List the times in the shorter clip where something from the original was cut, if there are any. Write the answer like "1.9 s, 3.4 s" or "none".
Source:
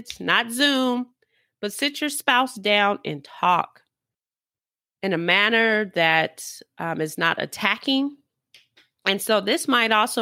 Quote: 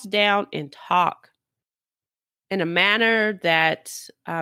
none